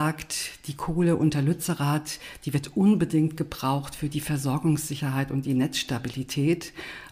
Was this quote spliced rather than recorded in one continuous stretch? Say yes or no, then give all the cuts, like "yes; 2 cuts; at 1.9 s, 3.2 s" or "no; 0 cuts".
no; 0 cuts